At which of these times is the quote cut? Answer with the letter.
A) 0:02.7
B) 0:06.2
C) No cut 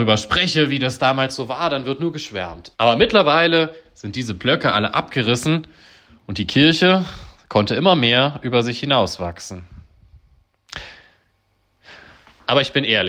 A